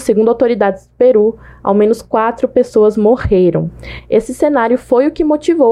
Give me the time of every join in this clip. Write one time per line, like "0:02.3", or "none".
none